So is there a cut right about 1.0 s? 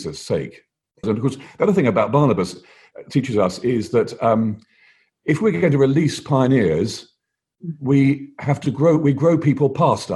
yes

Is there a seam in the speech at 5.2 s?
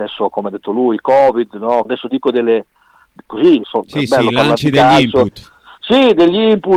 no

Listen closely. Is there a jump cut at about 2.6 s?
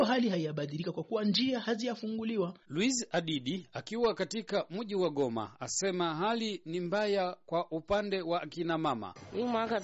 yes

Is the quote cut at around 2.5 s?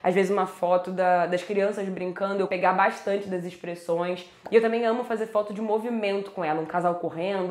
yes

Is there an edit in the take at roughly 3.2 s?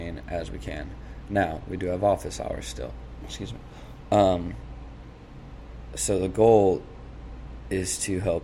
yes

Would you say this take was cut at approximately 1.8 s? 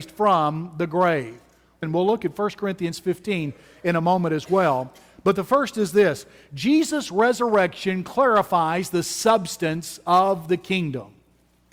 yes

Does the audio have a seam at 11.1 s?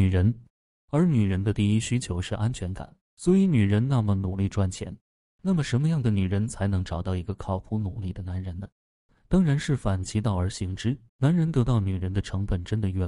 yes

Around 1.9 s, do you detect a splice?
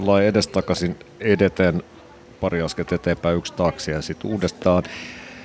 no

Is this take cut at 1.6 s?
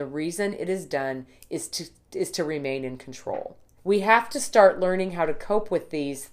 no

